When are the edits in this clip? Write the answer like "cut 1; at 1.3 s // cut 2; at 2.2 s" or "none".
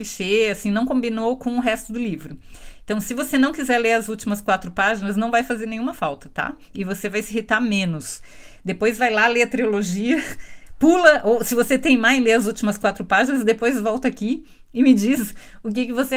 none